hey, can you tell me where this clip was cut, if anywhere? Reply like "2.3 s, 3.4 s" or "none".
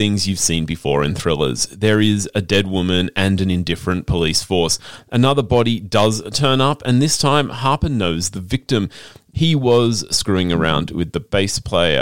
9.3 s